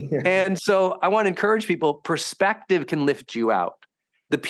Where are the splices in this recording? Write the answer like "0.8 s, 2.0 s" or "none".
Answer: none